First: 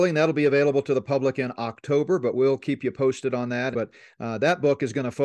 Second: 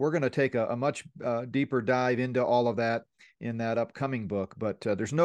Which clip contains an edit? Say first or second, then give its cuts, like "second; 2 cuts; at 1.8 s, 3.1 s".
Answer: first; 1 cut; at 3.7 s